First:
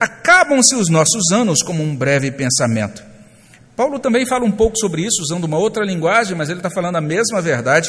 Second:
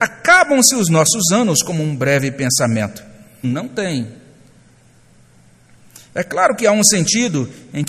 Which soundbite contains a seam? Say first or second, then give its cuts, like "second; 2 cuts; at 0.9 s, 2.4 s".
second; 1 cut; at 3.4 s